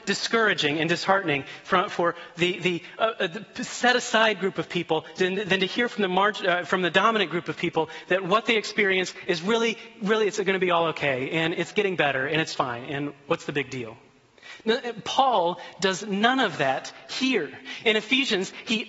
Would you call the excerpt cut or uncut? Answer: cut